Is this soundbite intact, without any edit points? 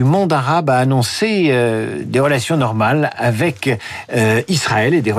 yes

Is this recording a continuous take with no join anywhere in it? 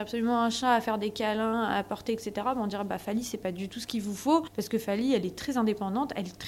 yes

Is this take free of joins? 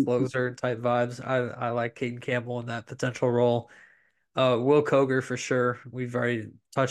yes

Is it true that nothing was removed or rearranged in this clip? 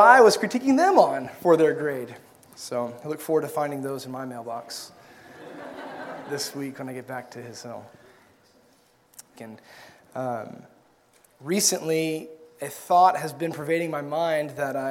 no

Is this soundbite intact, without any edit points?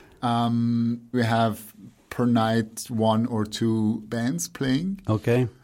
no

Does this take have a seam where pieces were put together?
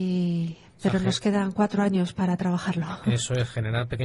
no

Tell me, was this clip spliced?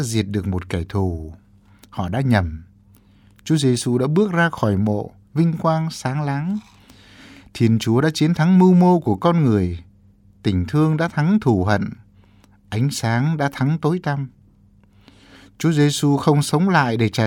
no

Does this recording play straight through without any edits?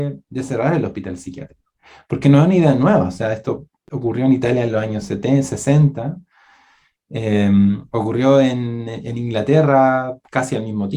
yes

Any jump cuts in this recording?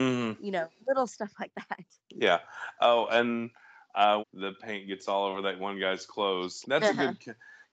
yes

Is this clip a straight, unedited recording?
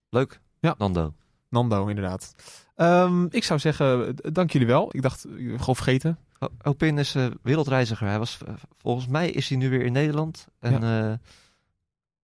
no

